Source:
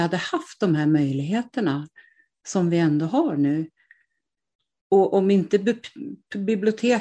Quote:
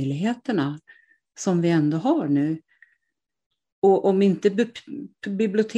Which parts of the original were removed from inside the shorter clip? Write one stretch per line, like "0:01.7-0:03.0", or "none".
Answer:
none